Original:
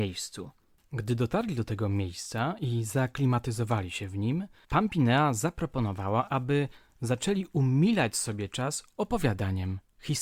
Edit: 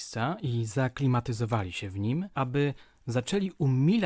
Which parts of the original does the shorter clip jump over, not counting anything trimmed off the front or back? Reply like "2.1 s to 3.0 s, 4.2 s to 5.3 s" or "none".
4.5 s to 6.3 s